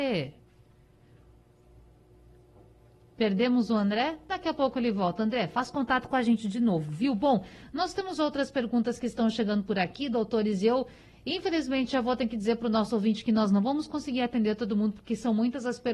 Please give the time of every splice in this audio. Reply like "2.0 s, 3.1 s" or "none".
none